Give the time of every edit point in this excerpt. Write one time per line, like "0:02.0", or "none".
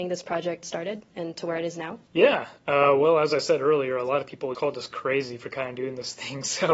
0:04.5